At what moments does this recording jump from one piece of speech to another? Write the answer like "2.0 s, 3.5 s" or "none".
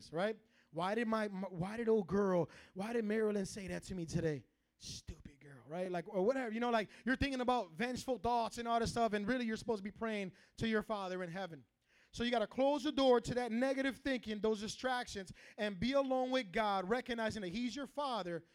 none

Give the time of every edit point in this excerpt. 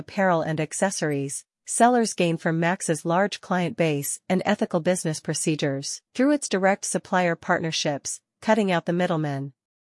6.1 s, 8.3 s

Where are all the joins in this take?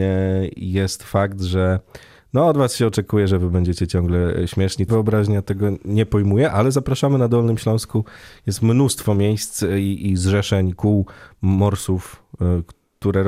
4.9 s

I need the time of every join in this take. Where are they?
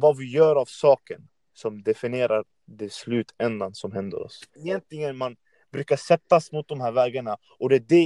4.6 s

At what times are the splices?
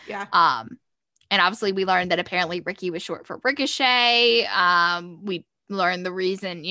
none

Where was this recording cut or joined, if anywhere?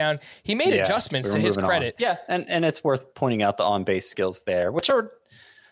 2.0 s

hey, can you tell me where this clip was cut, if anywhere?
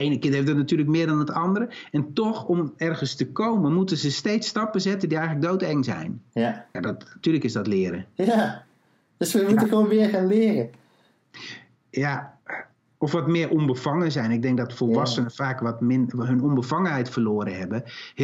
6.7 s

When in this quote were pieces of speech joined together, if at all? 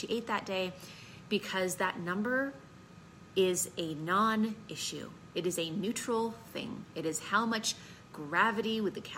none

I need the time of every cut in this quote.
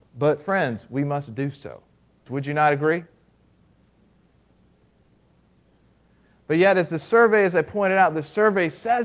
2.3 s

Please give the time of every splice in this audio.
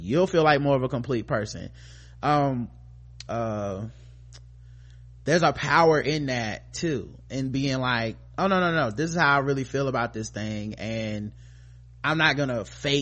3.3 s

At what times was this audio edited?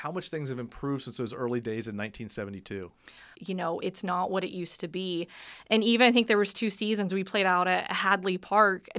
3.3 s

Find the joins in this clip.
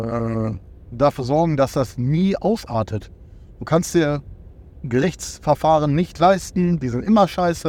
none

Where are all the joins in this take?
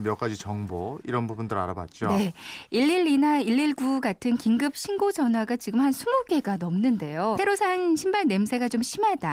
7.4 s

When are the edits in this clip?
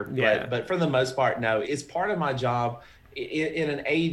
1.6 s, 2.9 s

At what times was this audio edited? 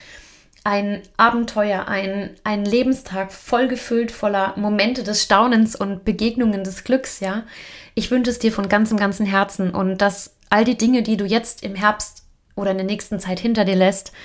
none

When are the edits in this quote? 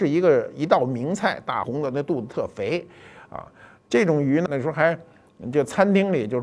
1.6 s, 4.5 s

